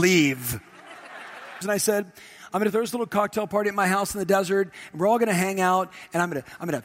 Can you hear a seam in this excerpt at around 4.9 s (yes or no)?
no